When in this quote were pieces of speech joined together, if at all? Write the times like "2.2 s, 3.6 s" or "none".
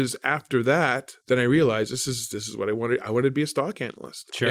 1.2 s